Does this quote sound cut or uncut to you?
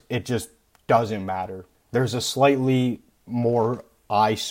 cut